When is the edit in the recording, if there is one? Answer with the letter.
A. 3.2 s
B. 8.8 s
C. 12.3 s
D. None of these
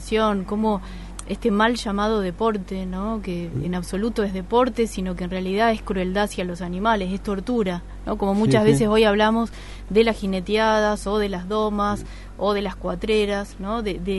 D